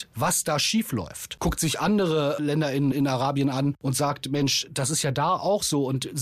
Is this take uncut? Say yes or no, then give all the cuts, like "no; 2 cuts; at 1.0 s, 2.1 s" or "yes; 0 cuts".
no; 2 cuts; at 1.4 s, 2.9 s